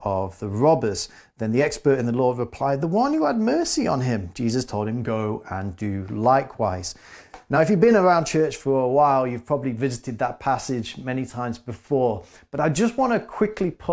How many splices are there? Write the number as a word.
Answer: zero